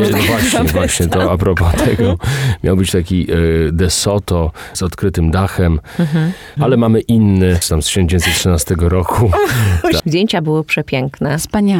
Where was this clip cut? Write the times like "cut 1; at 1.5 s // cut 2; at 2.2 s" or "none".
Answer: cut 1; at 6.6 s // cut 2; at 7.7 s // cut 3; at 10.0 s